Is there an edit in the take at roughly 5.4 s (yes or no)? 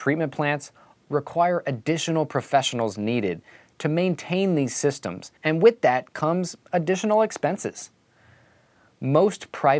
yes